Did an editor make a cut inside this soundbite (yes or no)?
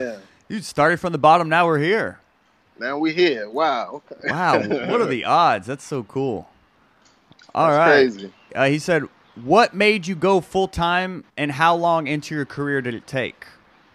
yes